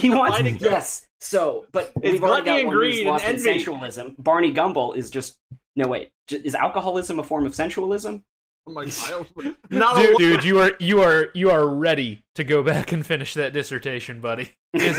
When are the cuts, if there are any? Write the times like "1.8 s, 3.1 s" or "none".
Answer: 8.6 s, 10.2 s

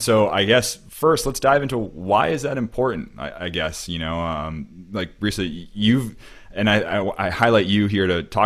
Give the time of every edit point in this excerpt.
none

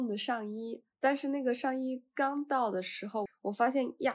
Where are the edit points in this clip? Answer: 0.9 s, 3.3 s

